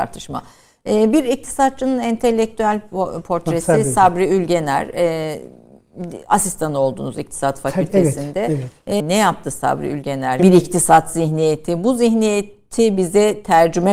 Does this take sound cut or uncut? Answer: cut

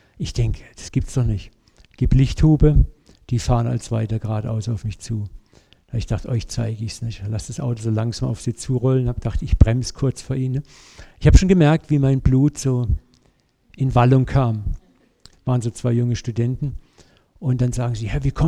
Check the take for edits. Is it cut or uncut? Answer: cut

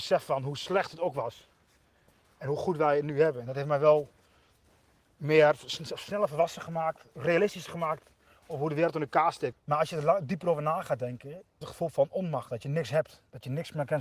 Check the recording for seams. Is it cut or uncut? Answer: cut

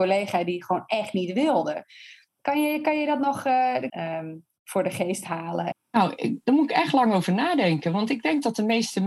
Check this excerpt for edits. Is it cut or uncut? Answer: cut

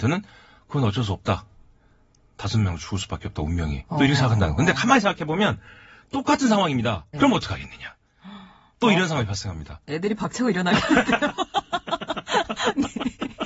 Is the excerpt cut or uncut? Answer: cut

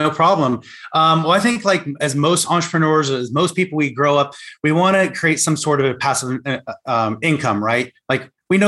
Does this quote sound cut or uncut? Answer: uncut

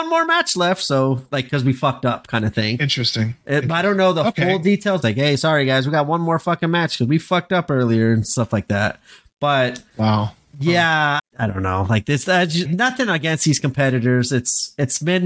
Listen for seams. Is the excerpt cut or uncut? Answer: cut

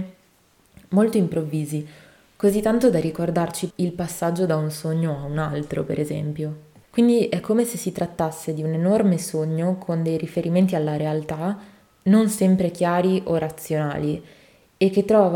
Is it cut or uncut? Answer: cut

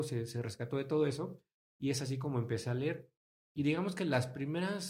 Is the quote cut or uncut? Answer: uncut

